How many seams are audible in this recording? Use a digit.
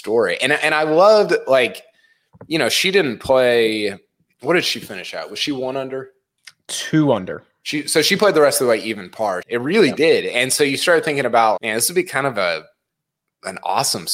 2